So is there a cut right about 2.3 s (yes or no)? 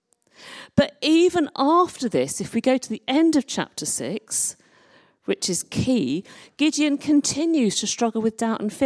no